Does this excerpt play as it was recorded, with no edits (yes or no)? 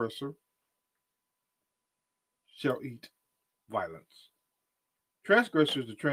yes